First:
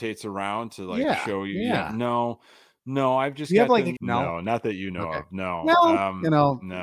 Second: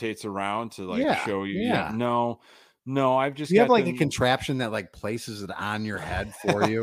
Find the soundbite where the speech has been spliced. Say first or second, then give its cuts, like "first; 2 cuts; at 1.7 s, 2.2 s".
first; 1 cut; at 4.0 s